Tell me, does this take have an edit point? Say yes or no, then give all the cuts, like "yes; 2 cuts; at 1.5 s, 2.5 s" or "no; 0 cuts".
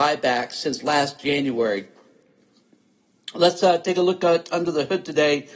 no; 0 cuts